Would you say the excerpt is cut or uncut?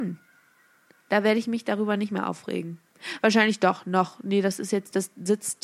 uncut